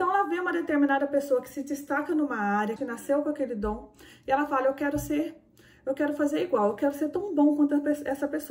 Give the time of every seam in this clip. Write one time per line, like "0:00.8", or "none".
0:02.8